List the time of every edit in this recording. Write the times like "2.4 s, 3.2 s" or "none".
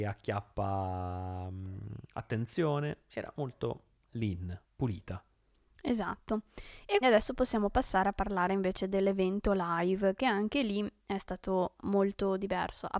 7.0 s, 11.8 s